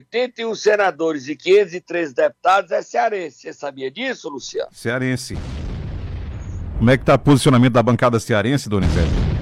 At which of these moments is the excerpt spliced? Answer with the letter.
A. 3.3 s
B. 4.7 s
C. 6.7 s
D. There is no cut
C